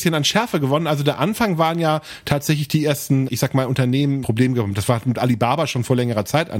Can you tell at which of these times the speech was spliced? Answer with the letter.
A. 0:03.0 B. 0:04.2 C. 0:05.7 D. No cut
B